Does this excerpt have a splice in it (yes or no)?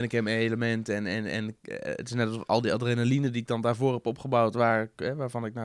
no